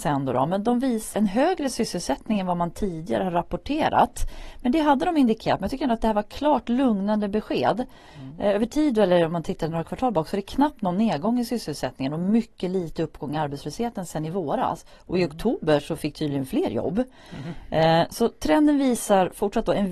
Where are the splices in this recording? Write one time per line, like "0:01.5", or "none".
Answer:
0:01.1

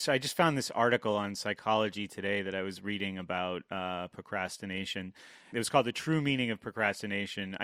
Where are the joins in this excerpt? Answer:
none

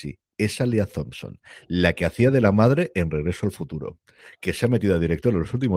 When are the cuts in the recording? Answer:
none

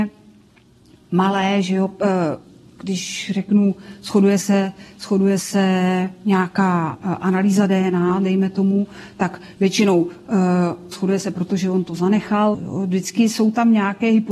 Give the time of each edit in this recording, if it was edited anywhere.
0:10.9
0:12.5

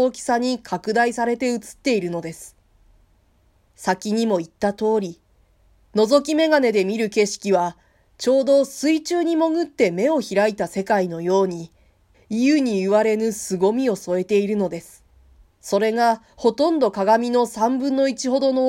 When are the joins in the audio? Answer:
0:12.1
0:15.5

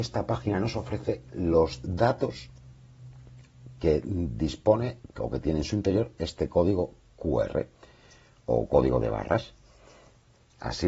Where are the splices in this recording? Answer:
none

